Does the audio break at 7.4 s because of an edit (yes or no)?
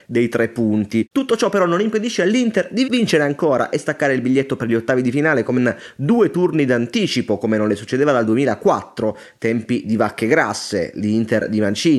no